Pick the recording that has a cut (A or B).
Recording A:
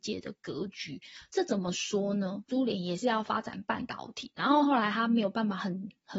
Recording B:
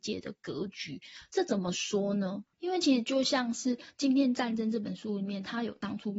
A